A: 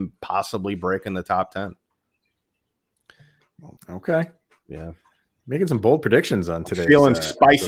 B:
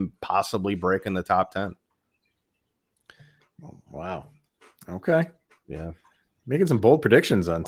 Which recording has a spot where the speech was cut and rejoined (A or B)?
A